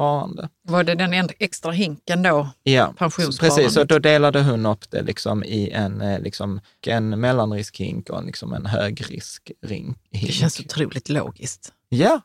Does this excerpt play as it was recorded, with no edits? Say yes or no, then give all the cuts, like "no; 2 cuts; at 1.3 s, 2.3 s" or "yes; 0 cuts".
no; 1 cut; at 6.8 s